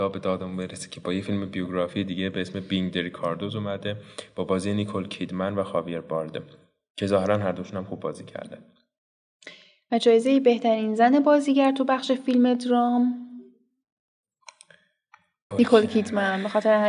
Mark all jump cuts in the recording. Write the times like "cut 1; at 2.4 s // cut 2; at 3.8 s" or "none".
cut 1; at 15.5 s